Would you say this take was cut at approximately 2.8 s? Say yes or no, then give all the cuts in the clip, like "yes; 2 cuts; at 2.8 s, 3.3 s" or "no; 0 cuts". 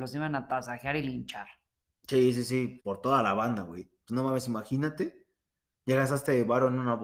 yes; 1 cut; at 2.8 s